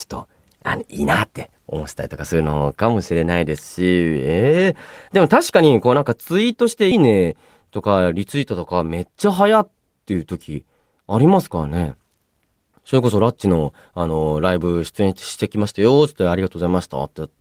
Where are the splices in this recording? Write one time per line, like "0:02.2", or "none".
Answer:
0:06.9